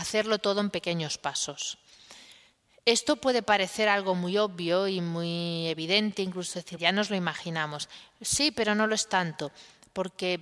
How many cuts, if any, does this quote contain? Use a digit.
1